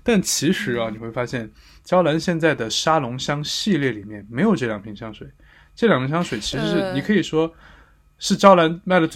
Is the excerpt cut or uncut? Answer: uncut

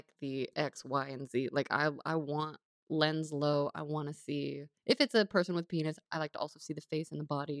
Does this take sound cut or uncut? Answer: cut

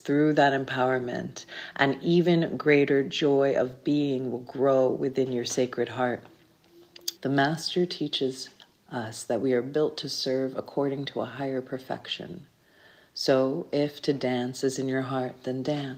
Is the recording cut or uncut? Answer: cut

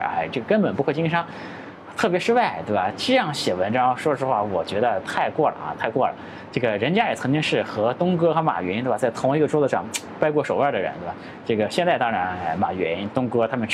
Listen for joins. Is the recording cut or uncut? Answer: uncut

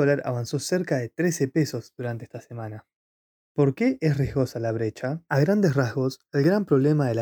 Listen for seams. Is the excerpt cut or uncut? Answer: uncut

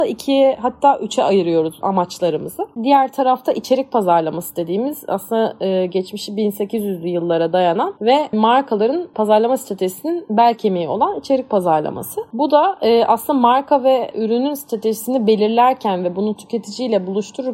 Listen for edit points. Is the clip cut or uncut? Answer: cut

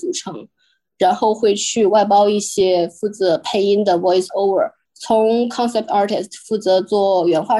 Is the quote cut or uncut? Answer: cut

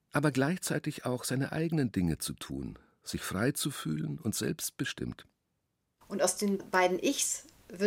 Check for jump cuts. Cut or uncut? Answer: cut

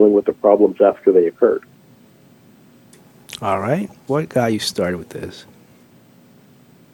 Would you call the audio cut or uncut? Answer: cut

